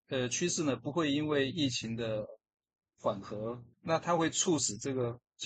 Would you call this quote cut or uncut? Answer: cut